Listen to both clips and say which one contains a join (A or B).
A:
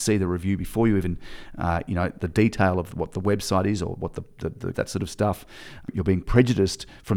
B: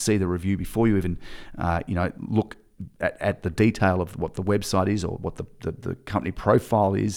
A